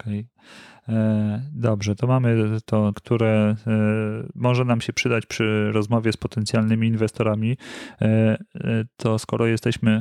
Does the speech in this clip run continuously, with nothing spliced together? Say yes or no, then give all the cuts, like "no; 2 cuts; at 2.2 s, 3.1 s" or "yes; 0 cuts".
no; 1 cut; at 2.9 s